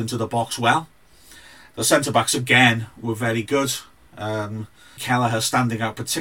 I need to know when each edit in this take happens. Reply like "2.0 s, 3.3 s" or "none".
5.0 s